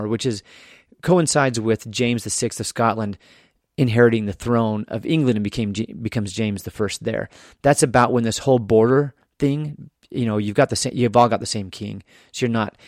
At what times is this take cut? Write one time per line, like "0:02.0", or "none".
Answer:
none